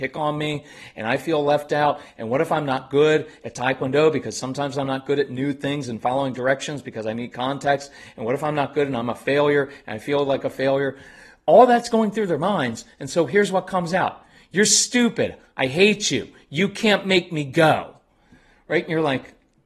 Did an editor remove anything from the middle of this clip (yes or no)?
no